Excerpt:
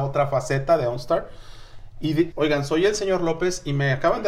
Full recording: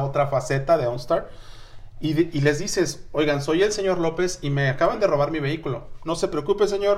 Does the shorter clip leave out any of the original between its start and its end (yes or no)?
yes